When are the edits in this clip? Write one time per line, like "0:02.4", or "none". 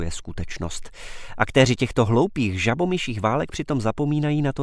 none